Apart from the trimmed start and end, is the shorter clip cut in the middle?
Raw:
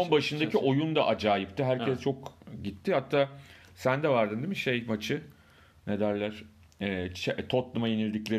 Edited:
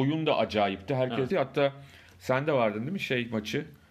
yes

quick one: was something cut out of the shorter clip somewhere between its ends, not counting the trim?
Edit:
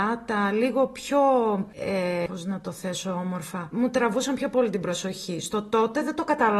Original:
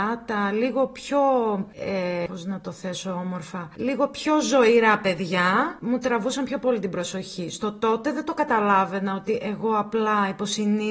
yes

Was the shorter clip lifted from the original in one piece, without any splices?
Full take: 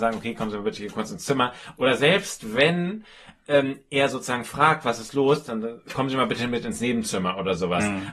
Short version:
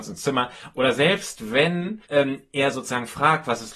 no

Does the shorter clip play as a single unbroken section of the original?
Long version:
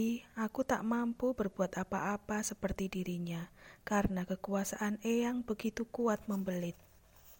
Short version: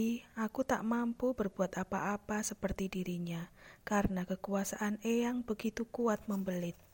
yes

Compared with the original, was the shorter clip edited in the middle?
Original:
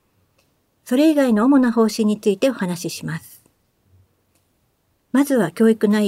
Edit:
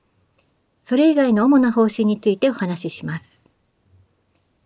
no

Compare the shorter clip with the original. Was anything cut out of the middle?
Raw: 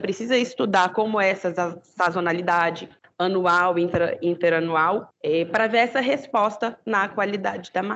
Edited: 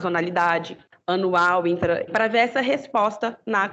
yes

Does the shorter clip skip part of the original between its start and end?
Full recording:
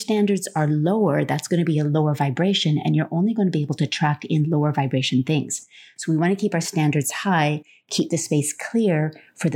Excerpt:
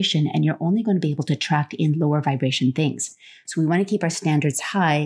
no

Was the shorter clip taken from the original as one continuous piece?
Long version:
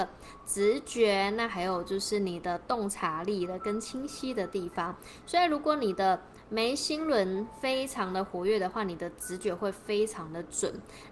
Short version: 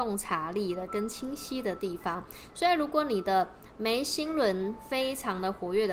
yes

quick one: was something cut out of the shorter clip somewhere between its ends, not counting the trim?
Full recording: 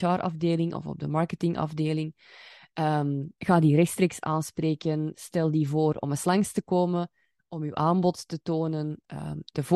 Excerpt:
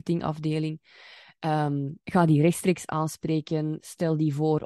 no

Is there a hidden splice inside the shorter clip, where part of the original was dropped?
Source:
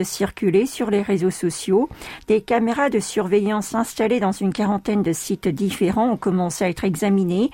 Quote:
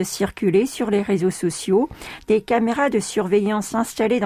no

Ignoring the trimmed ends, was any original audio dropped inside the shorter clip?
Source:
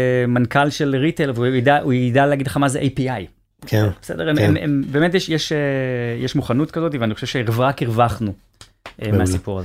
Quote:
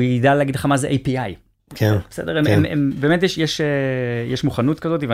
no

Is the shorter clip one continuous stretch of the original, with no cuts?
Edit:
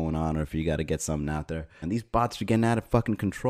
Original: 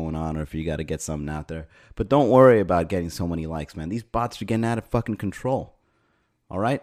no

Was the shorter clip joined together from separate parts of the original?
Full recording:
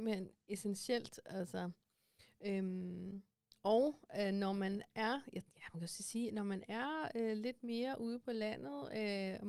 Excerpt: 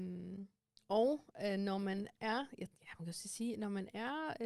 no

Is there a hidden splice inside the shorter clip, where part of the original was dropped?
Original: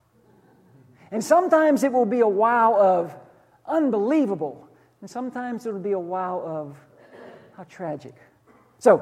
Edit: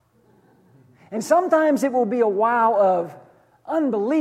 no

